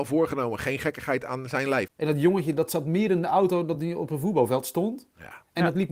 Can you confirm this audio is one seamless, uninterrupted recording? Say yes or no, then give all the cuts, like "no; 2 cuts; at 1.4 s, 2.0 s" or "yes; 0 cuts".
no; 1 cut; at 1.9 s